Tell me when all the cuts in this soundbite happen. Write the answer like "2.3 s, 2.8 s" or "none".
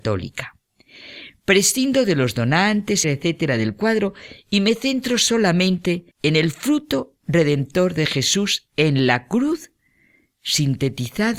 3.0 s, 6.1 s